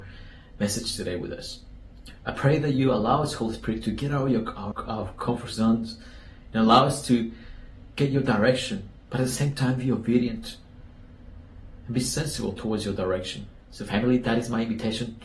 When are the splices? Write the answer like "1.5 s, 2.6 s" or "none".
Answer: 4.7 s, 13.6 s

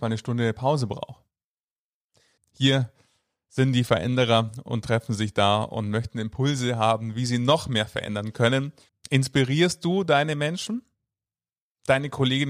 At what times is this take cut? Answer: 2.4 s, 8.9 s

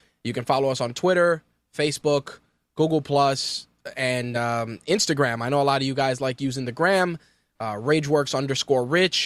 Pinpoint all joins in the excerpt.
none

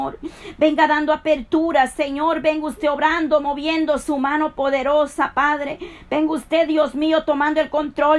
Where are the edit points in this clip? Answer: none

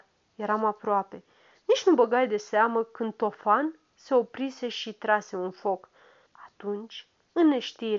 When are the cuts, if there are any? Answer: 6.3 s

